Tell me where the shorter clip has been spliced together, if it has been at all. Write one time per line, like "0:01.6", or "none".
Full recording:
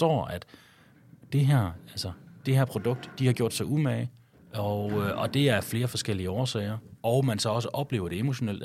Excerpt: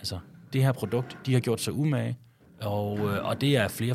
none